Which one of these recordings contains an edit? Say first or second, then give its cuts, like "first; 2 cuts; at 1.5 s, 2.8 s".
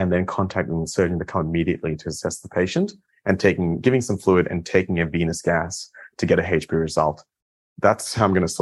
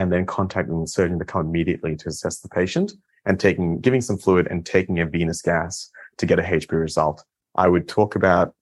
second; 1 cut; at 7.4 s